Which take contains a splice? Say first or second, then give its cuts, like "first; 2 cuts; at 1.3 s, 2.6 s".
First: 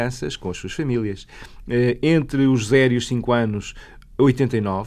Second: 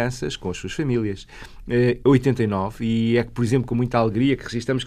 second; 1 cut; at 2.0 s